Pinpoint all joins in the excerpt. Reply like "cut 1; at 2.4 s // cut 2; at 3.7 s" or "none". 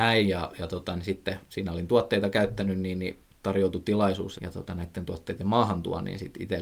cut 1; at 4.4 s